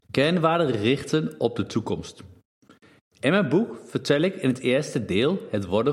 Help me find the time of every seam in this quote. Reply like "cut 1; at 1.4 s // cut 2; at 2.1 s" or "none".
none